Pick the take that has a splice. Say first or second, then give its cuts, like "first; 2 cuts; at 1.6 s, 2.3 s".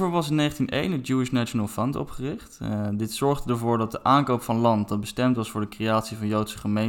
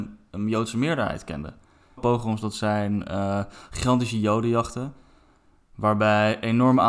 second; 1 cut; at 2.0 s